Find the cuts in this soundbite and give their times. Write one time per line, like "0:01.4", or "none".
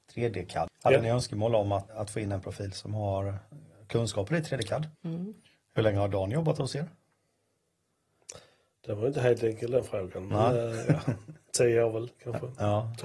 0:01.9
0:04.9